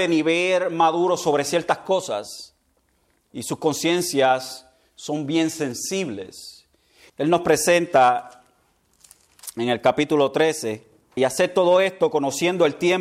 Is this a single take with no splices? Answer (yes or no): no